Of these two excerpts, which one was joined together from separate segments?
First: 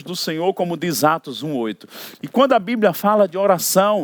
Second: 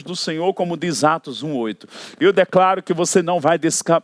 first; 1 cut; at 2.1 s

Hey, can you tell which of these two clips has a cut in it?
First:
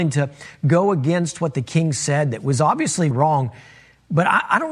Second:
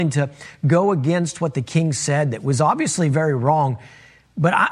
first; 1 cut; at 3.1 s

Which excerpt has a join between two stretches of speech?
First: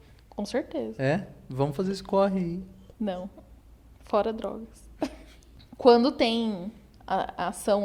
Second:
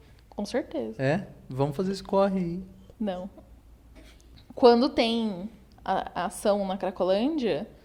second; 1 cut; at 4.0 s

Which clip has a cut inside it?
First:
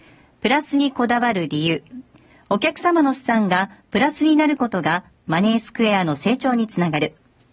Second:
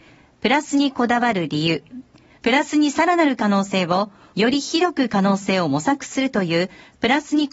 second; 2 cuts; at 2.4 s, 4.3 s

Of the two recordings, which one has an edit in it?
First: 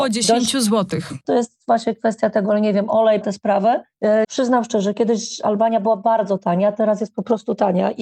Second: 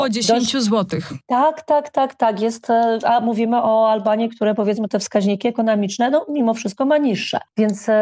first; 3 cuts; at 1.2 s, 3.2 s, 4.2 s

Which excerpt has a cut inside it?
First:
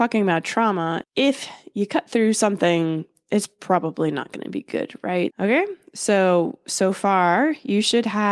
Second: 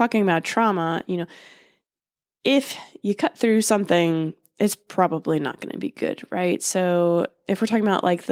first; 2 cuts; at 1.0 s, 5.3 s

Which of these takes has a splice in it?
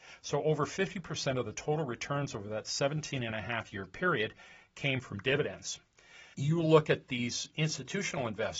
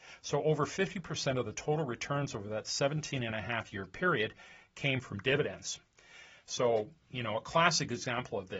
first; 1 cut; at 6.3 s

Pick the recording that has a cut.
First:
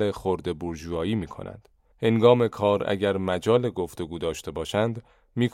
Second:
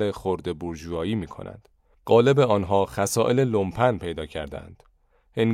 first; 1 cut; at 1.9 s

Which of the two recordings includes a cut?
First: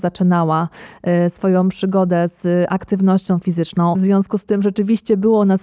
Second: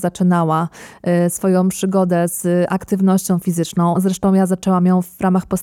first; 1 cut; at 3.9 s

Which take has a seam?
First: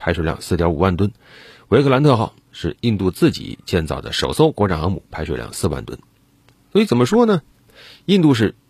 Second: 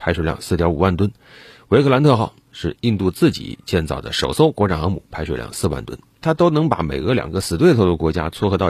second; 1 cut; at 6.2 s

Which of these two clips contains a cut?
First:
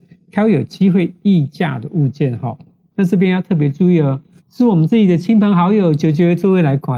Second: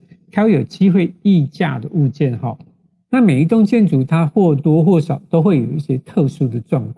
first; 2 cuts; at 2.9 s, 4.4 s

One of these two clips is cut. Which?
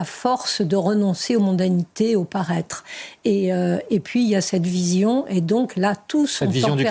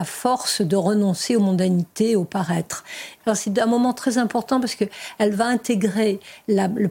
second; 1 cut; at 3.2 s

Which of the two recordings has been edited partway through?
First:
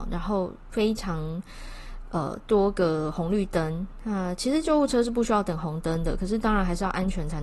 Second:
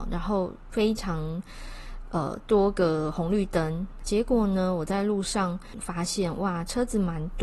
second; 1 cut; at 4.0 s

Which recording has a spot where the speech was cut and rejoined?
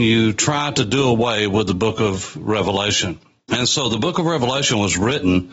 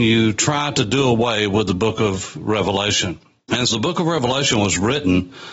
second; 1 cut; at 3.7 s

